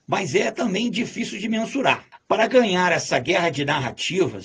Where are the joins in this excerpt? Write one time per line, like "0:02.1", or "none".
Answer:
0:02.2